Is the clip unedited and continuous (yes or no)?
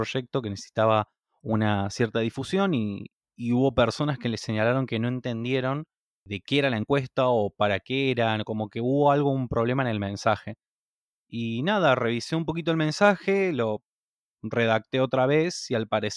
yes